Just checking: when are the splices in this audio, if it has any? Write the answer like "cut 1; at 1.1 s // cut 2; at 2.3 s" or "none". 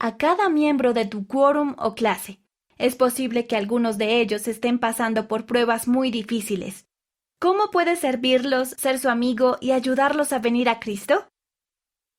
cut 1; at 8.7 s